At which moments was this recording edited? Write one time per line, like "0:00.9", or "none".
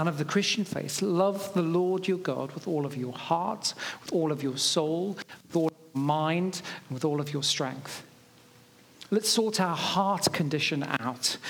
none